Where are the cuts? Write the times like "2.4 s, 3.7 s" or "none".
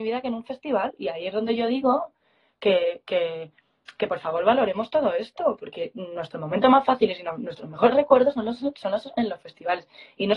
none